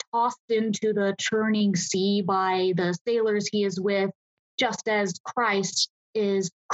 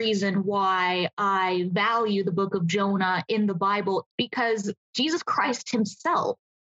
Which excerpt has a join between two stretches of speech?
second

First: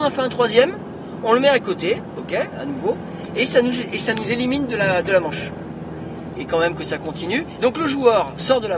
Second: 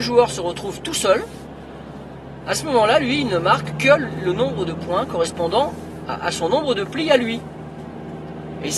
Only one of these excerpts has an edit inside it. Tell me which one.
first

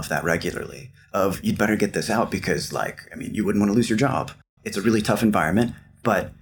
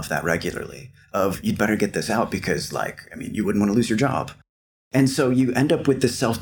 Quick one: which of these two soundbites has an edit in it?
first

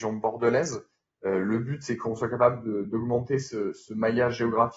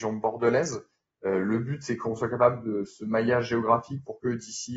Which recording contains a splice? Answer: second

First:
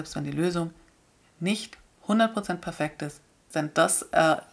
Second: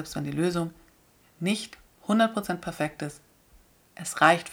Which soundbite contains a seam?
first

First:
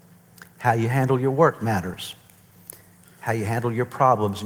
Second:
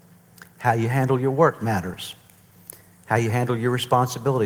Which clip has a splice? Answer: first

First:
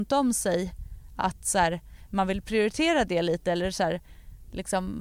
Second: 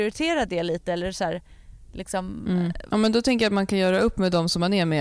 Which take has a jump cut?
second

